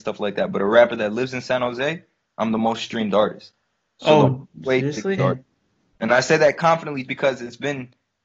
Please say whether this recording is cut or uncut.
cut